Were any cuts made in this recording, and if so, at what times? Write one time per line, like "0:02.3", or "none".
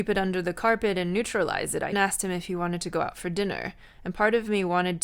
0:01.9